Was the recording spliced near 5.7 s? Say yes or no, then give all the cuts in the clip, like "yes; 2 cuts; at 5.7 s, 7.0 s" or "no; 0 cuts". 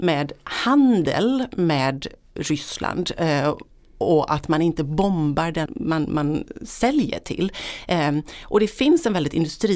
yes; 1 cut; at 5.7 s